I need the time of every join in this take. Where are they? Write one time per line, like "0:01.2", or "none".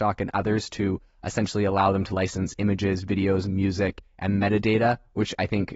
none